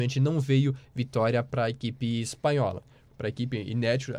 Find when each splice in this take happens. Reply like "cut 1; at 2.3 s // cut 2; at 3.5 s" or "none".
cut 1; at 3.1 s

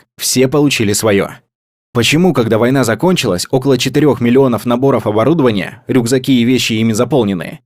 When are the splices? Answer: none

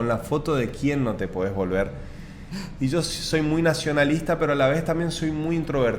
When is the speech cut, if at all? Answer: none

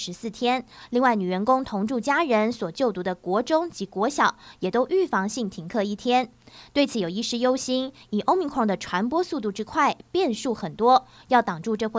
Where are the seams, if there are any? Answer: none

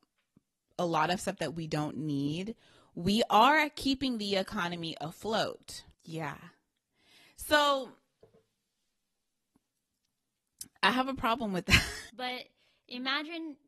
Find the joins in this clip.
cut 1; at 5.9 s // cut 2; at 12.1 s

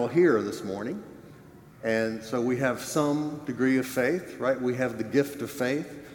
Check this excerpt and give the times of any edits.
none

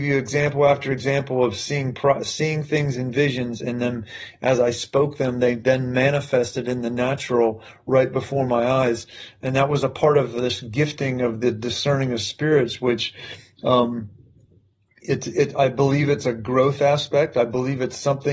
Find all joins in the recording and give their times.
none

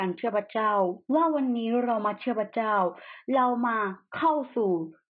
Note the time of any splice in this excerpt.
cut 1; at 1.0 s

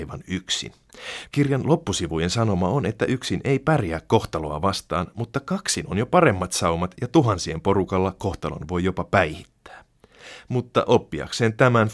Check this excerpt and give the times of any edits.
cut 1; at 1.3 s

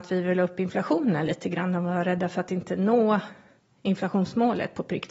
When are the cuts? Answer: none

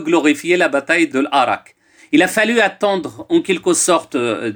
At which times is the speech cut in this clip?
cut 1; at 2.0 s

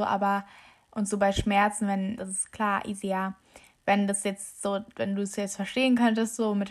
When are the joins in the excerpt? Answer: cut 1; at 2.2 s

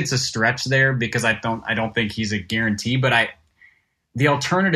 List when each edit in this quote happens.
none

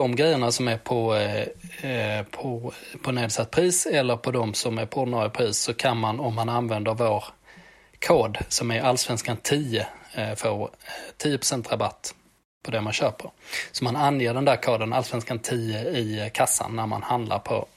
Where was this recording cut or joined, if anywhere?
none

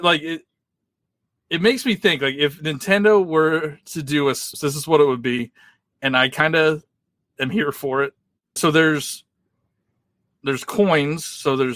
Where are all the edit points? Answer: cut 1; at 4.5 s // cut 2; at 8.6 s

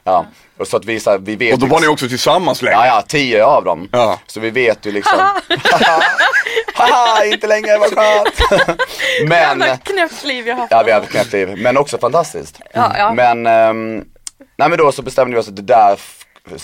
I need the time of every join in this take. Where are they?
none

